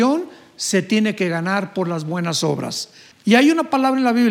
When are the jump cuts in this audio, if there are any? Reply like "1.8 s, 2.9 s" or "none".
3.1 s